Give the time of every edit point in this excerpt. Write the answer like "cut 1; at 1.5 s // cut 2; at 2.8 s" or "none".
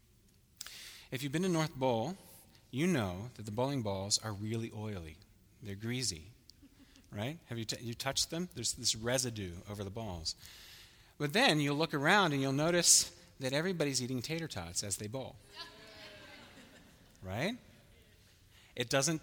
none